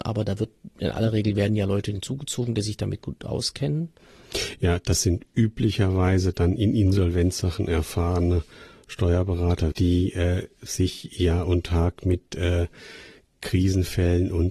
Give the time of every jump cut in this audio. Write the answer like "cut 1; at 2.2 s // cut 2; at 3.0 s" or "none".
cut 1; at 9.7 s